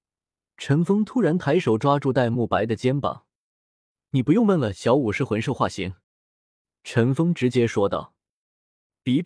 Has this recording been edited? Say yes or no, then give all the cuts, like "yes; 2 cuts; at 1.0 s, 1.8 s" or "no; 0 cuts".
yes; 1 cut; at 6.0 s